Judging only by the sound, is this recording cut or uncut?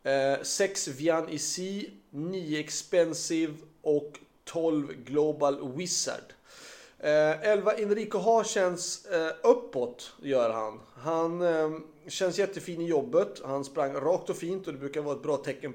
uncut